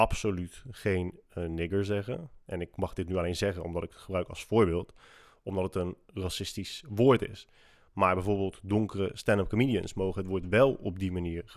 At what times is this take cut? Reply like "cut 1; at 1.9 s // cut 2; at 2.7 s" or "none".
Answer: cut 1; at 7.9 s